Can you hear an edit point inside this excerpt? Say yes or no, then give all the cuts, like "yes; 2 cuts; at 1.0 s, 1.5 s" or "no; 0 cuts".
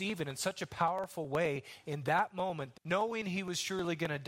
yes; 1 cut; at 2.7 s